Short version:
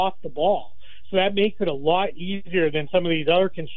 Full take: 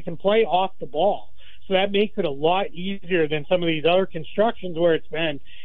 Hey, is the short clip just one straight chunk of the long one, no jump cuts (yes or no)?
yes